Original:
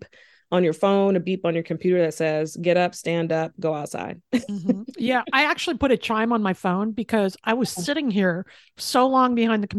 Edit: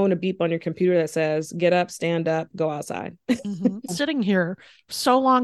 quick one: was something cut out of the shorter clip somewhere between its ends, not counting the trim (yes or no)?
yes